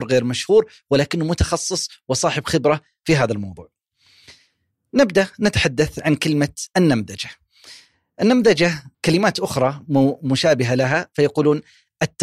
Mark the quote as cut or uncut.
cut